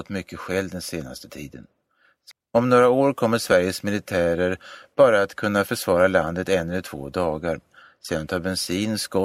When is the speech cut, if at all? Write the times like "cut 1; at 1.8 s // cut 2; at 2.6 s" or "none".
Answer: cut 1; at 2.3 s